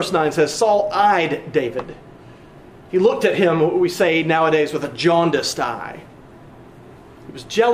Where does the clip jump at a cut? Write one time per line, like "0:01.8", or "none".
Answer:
none